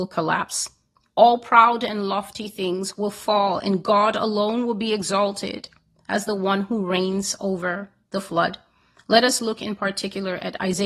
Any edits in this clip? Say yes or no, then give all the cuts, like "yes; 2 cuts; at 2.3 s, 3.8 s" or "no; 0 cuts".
no; 0 cuts